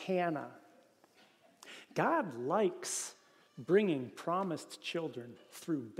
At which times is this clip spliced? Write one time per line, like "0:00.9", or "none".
none